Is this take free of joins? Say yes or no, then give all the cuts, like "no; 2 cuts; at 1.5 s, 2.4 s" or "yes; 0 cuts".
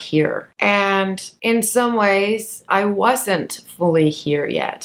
no; 1 cut; at 2.7 s